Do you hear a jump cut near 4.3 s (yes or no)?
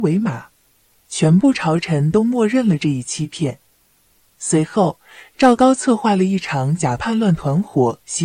yes